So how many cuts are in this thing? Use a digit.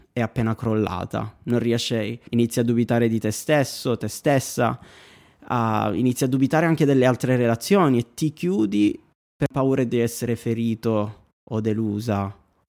1